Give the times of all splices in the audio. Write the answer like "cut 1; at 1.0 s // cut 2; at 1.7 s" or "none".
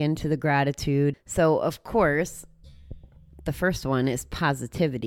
cut 1; at 1.1 s